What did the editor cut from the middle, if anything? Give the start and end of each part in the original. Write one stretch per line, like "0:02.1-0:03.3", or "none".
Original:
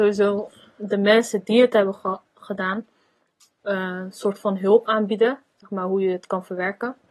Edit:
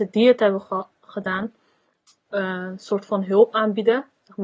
none